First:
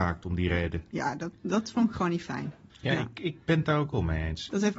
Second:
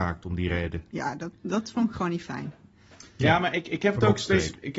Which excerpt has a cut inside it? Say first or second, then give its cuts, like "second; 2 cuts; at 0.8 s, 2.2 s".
first; 1 cut; at 2.7 s